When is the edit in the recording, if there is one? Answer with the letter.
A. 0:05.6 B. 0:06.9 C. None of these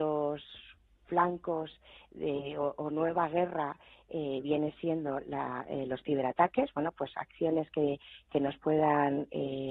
C